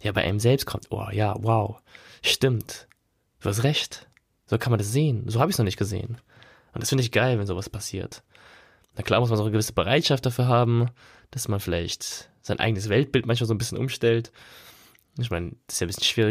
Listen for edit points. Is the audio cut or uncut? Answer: uncut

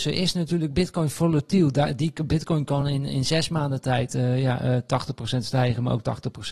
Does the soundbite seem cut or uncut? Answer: uncut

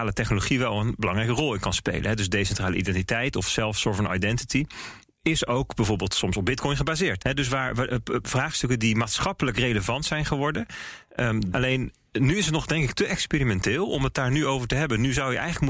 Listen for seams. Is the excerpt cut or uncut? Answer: cut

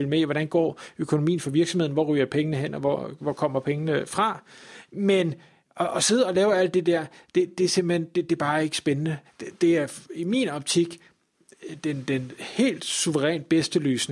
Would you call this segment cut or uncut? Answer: cut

